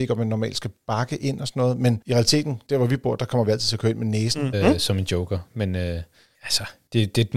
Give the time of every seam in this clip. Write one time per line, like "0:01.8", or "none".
0:04.5